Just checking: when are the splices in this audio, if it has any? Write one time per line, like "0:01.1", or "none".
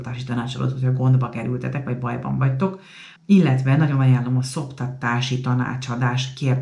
0:03.2